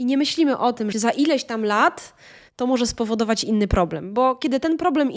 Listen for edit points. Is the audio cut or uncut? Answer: cut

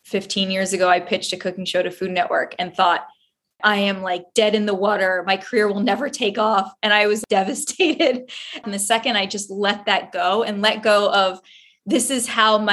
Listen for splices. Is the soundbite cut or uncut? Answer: cut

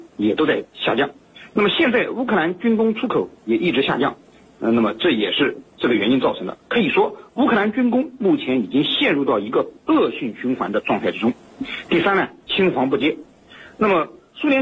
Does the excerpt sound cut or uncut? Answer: cut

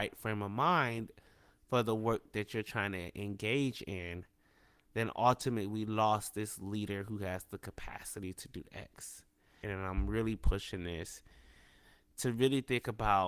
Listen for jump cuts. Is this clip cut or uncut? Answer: cut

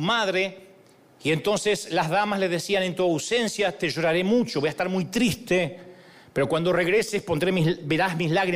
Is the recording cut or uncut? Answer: uncut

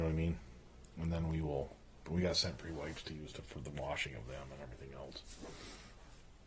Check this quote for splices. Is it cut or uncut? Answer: cut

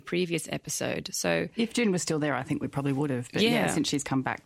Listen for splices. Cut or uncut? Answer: uncut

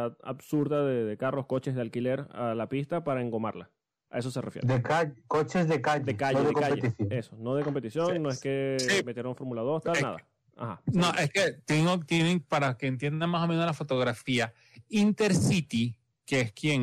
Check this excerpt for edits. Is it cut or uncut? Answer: uncut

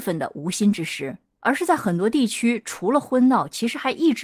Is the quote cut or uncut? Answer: uncut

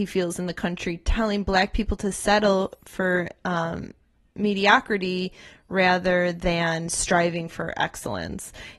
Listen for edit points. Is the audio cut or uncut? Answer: uncut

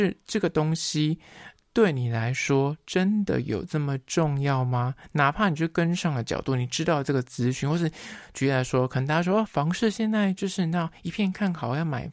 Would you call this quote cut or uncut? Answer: uncut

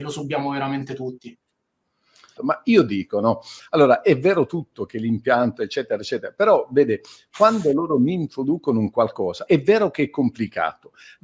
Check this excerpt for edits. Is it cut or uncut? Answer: cut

